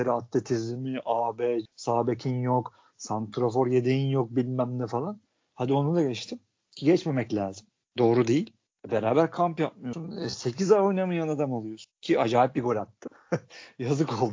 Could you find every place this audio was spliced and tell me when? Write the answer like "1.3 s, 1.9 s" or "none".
1.7 s